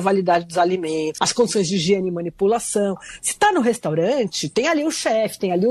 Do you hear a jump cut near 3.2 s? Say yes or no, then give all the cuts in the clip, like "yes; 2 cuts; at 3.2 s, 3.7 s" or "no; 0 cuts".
no; 1 cut; at 1.2 s